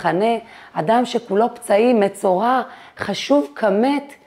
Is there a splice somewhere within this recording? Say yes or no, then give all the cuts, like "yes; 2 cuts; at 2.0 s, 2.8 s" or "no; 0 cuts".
no; 0 cuts